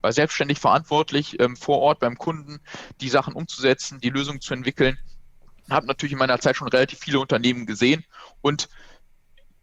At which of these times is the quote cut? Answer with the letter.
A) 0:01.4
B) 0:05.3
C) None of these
C